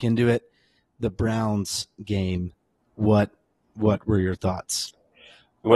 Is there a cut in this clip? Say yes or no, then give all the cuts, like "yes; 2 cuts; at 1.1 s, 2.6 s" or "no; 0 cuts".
no; 0 cuts